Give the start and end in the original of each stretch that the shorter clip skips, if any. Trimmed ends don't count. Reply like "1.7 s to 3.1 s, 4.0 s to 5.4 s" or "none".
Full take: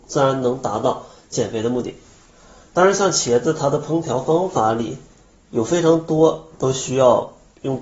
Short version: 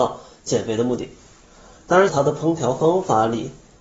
2.9 s to 3.5 s